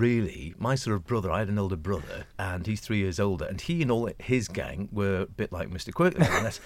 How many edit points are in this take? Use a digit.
1